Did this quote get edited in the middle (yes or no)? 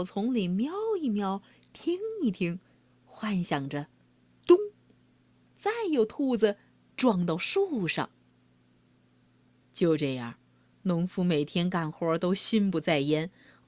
no